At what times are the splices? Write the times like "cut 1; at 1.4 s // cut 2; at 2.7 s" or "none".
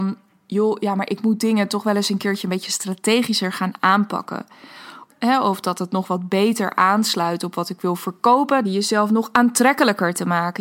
cut 1; at 5.1 s // cut 2; at 8.6 s